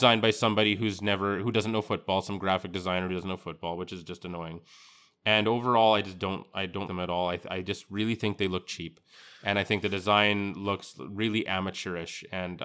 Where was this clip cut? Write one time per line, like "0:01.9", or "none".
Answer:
0:06.9